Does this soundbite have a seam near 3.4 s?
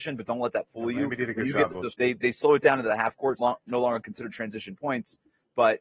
yes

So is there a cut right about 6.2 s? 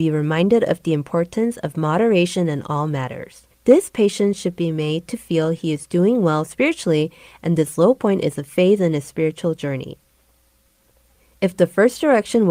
no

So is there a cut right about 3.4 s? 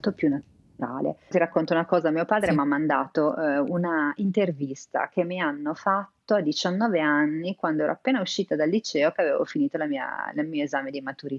no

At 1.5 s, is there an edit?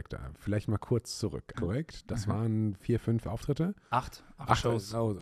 yes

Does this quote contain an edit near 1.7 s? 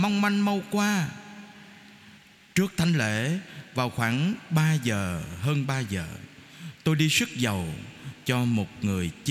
no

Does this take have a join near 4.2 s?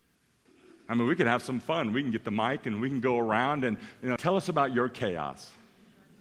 yes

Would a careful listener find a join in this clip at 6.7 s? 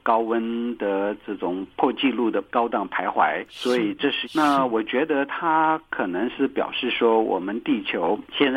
no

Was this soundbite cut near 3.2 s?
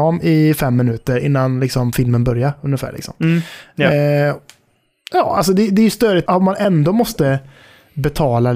no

